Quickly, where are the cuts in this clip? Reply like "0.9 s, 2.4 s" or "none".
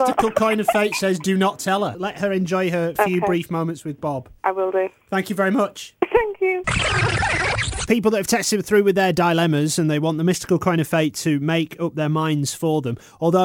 7.9 s